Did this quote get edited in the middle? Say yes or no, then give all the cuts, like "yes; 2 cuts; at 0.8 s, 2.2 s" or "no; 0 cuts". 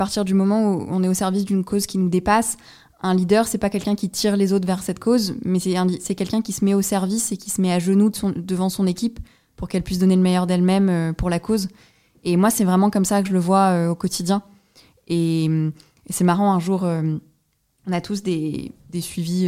no; 0 cuts